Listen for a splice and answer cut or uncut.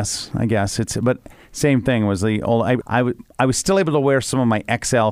cut